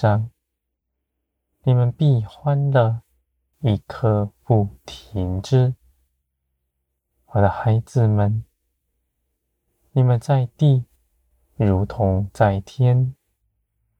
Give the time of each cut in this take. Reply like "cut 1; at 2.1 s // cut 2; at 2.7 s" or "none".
cut 1; at 3.5 s